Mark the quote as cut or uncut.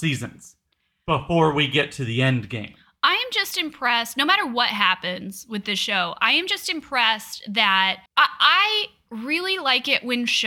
cut